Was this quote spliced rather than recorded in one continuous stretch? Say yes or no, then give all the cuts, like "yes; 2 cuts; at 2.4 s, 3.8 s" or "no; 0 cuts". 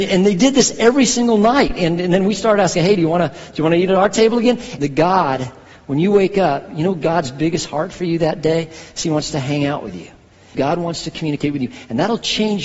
yes; 2 cuts; at 4.8 s, 10.5 s